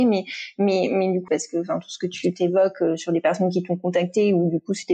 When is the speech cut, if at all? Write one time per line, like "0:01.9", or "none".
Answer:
0:01.3

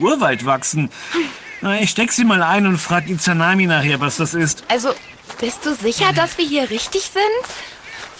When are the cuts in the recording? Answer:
none

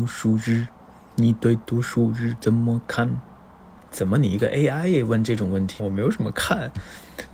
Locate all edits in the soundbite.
0:05.8

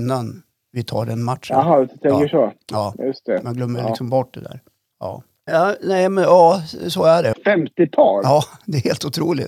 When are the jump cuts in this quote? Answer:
0:05.5
0:07.3

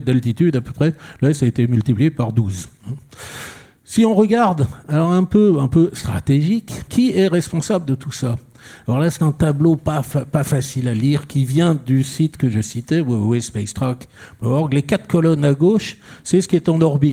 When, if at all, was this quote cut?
0:06.9

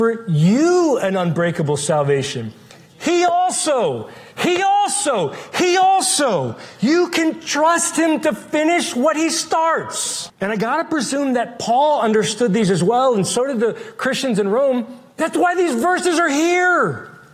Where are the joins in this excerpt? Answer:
0:04.3
0:10.3

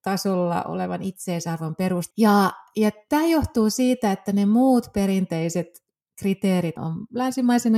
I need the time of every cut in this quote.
0:02.1
0:06.8

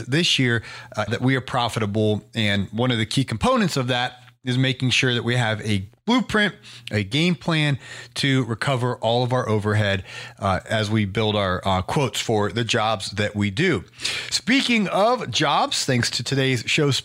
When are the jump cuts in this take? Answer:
0:01.1

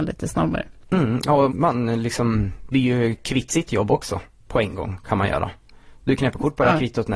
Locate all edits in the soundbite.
0:01.5

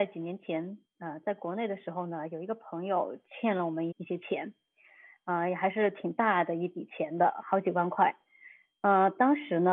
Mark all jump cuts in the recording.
0:03.9

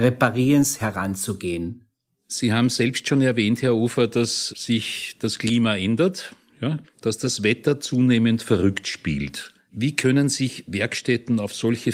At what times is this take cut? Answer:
0:04.5
0:06.8

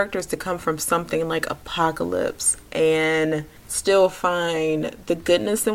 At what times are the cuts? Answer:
0:03.6

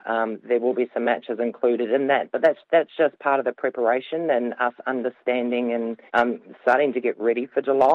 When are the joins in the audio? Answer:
0:06.1

